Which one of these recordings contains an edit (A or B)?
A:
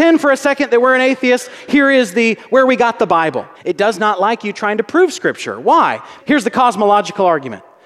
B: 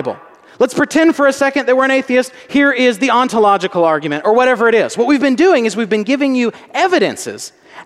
A